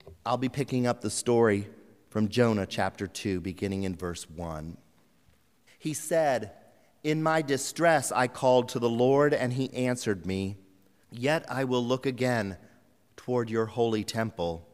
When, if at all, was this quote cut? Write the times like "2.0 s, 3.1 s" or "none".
5.7 s, 11.0 s